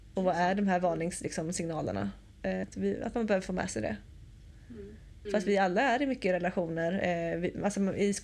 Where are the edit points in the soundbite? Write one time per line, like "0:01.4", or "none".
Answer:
0:02.6
0:05.2